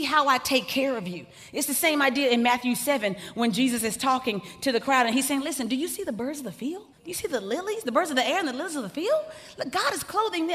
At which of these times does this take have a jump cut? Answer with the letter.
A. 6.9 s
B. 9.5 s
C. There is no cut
A